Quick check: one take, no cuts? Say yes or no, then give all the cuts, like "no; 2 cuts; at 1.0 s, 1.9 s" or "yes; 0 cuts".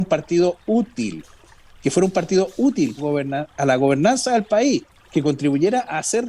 no; 1 cut; at 3.0 s